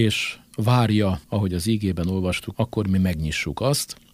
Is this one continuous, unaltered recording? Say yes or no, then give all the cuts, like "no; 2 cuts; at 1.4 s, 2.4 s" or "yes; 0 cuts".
no; 2 cuts; at 1.2 s, 2.5 s